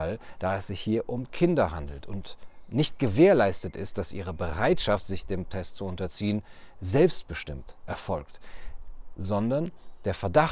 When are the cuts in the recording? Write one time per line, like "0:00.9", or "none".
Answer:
none

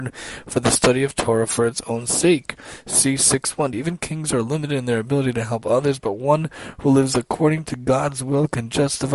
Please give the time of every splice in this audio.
0:03.7

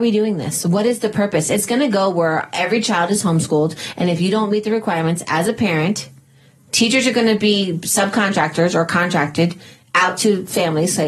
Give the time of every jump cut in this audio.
none

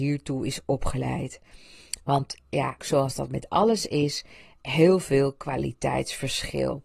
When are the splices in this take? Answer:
0:02.8

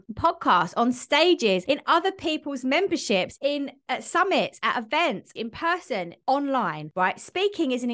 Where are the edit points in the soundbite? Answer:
0:03.4
0:05.4

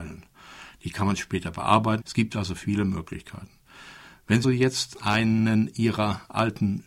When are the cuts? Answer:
0:02.0
0:04.4

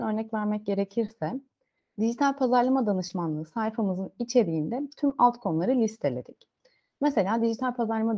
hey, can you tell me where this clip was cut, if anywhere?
none

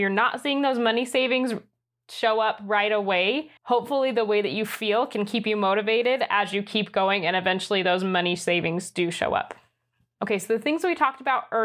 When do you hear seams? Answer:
0:03.6

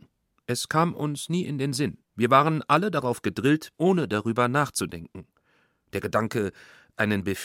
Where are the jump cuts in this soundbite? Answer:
0:02.0
0:03.7

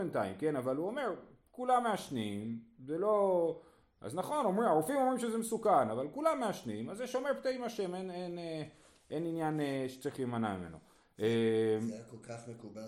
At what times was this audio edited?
none

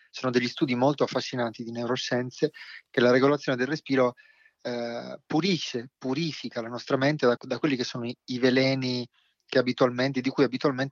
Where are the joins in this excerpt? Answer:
0:07.4

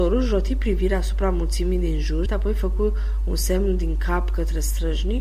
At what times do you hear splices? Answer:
0:02.3

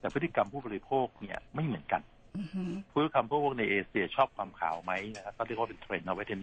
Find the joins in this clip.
0:01.5
0:02.9

